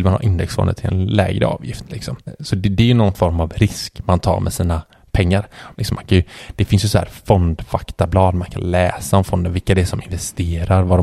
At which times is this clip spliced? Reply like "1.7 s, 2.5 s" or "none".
5.7 s